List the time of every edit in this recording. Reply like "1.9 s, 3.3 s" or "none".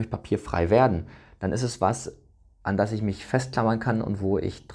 none